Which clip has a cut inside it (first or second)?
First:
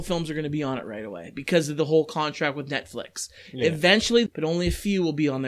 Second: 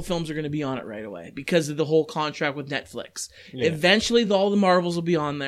first